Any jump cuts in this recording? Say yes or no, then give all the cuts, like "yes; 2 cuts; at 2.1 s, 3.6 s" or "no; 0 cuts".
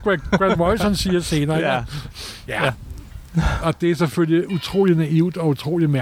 no; 0 cuts